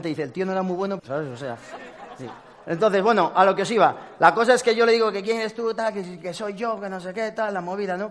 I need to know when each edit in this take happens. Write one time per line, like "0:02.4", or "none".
0:01.0